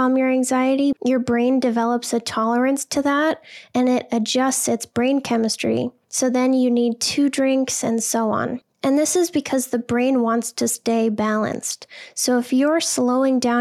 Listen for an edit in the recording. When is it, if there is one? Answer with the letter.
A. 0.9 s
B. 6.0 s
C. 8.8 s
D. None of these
A